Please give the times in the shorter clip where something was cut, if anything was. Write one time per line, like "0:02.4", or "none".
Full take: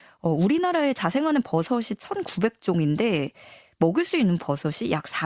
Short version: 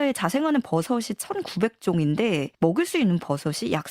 0:02.5